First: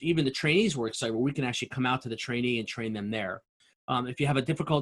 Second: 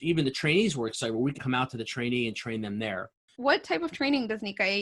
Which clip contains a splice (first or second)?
second